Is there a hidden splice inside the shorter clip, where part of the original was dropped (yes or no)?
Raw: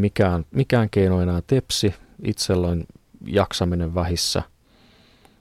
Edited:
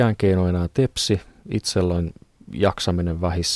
no